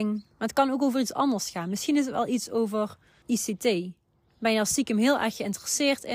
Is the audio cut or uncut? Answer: cut